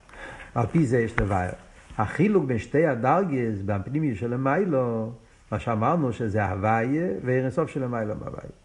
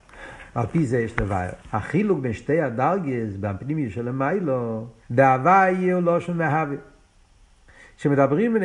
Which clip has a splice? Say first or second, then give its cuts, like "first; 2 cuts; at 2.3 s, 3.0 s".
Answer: second; 2 cuts; at 1.6 s, 5.0 s